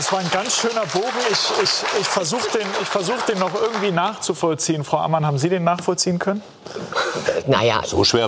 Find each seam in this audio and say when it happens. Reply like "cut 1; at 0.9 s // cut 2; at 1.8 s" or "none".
none